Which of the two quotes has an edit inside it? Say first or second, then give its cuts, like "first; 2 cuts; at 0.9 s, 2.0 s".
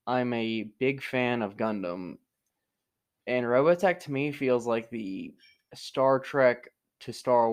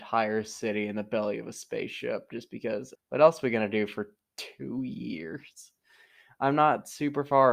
second; 1 cut; at 3.0 s